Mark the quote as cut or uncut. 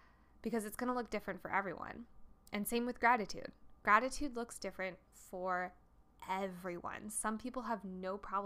uncut